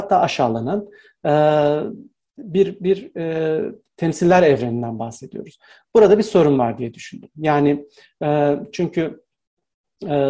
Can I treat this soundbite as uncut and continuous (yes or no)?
yes